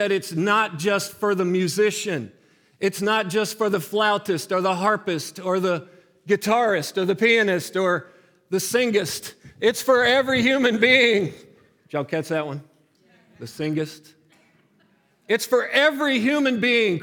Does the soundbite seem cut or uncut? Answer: uncut